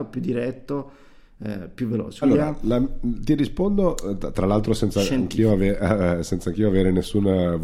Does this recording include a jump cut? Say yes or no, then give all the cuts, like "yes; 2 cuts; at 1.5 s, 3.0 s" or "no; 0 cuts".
yes; 1 cut; at 2.2 s